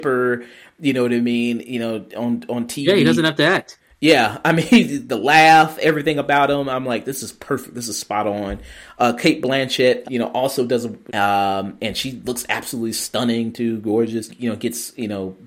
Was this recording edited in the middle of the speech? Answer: yes; 3 cuts; at 10.0 s, 11.1 s, 14.3 s

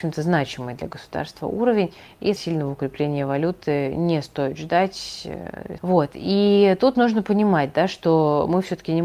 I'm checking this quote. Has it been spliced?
yes; 2 cuts; at 2.4 s, 5.8 s

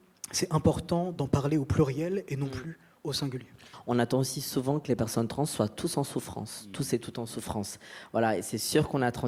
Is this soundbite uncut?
yes; 0 cuts

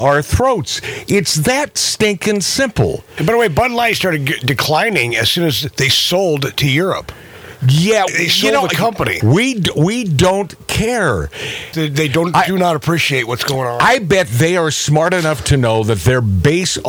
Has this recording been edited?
yes; 3 cuts; at 8.1 s, 9.2 s, 11.7 s

